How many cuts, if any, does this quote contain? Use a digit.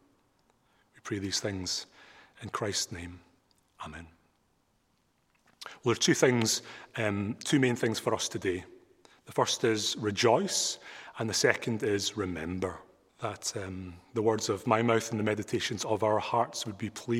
1